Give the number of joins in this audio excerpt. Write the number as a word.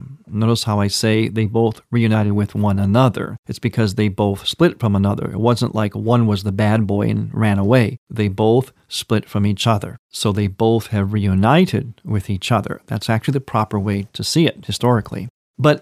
zero